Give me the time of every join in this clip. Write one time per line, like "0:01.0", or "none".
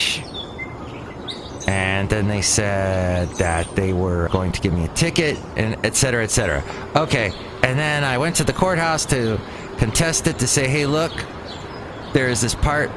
0:04.3